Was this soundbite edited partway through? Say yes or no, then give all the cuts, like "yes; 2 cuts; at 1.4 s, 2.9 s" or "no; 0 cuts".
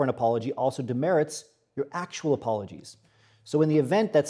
no; 0 cuts